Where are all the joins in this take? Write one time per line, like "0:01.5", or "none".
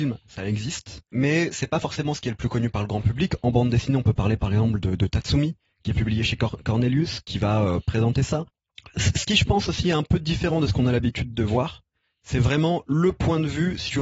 none